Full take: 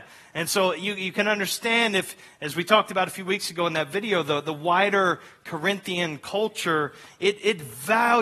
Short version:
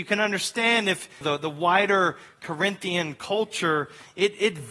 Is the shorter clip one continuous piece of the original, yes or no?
no